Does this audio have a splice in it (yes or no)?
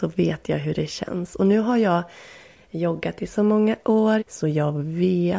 yes